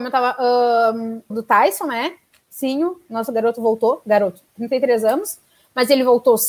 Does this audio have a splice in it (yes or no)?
yes